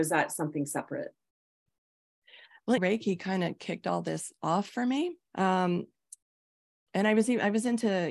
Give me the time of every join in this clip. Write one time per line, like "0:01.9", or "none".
0:02.8
0:05.2